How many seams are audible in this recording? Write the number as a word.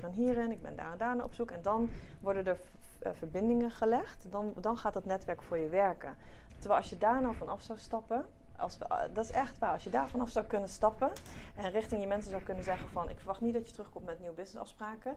one